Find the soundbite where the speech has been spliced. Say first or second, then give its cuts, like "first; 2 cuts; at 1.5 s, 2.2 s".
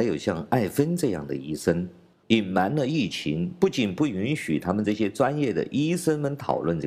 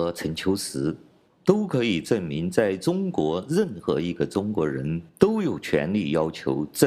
first; 1 cut; at 2.2 s